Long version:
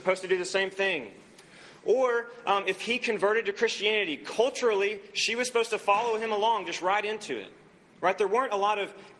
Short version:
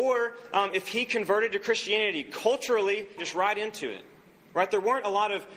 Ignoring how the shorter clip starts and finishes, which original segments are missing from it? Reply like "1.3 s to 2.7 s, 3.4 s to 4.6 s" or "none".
5.1 s to 6.6 s